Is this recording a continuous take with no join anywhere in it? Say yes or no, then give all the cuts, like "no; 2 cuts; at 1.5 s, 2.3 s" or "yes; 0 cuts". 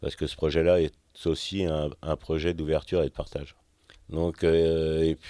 no; 1 cut; at 3.9 s